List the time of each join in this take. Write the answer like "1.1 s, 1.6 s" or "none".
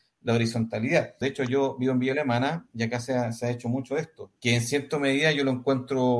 1.2 s, 4.4 s